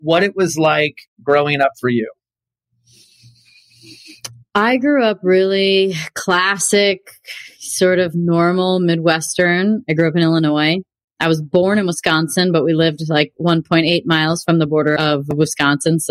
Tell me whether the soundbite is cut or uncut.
uncut